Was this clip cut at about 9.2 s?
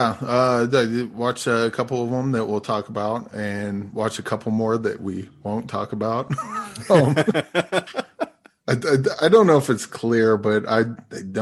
no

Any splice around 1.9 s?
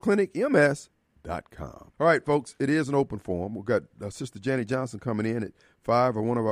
yes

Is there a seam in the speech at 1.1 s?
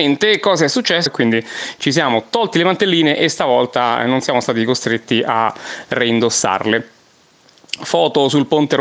yes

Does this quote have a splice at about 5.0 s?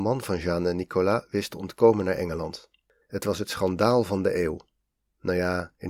no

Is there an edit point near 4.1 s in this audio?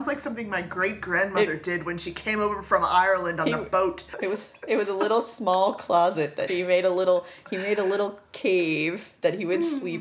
yes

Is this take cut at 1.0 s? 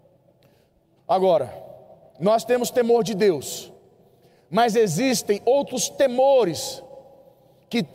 yes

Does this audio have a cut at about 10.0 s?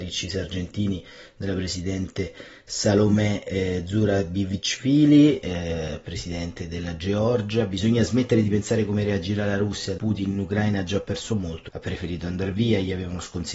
yes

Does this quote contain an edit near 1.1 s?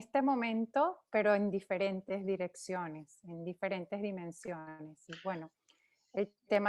no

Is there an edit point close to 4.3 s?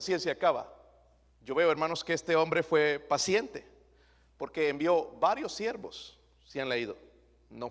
no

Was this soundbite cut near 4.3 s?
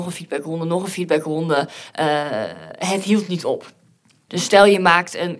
yes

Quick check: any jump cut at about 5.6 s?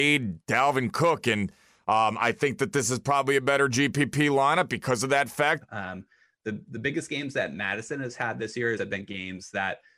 yes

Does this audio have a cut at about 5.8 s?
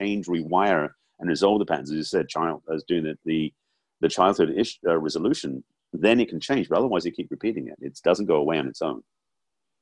no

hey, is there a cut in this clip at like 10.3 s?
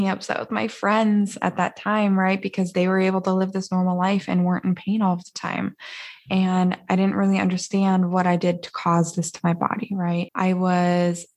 yes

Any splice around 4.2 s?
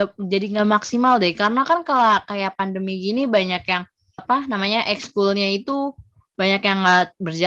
yes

